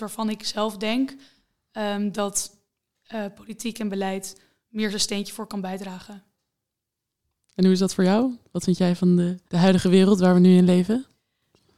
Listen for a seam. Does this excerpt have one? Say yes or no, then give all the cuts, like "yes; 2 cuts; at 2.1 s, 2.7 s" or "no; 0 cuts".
yes; 2 cuts; at 7.4 s, 9.5 s